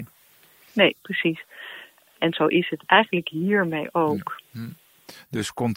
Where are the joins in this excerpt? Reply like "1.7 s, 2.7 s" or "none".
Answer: 2.2 s, 4.4 s